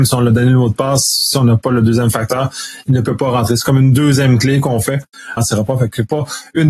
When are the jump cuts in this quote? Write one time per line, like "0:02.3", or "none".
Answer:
0:05.4